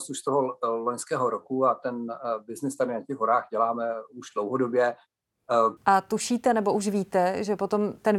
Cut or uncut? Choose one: cut